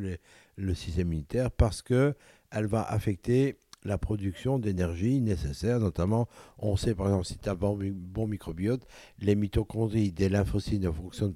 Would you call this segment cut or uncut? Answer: uncut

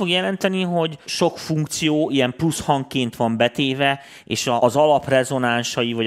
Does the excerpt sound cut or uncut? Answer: cut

